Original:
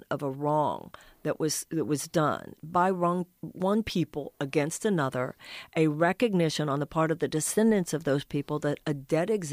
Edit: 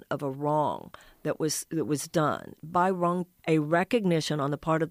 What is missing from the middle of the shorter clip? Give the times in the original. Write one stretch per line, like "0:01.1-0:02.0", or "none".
0:03.4-0:05.7